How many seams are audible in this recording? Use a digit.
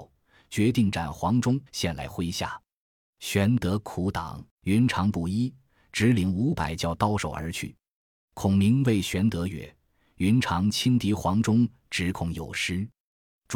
2